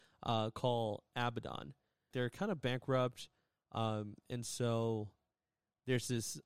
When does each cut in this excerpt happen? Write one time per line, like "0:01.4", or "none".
0:02.1